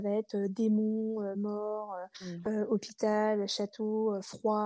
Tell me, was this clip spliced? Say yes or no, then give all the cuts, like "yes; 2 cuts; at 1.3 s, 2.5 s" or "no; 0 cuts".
no; 0 cuts